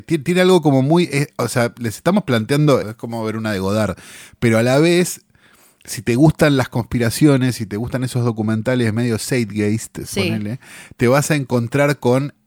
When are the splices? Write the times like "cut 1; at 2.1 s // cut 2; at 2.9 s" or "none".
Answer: cut 1; at 2.8 s